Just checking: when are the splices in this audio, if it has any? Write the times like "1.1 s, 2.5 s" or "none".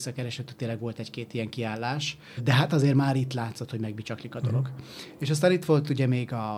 2.4 s